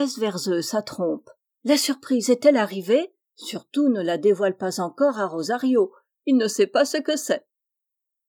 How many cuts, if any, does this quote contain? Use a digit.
1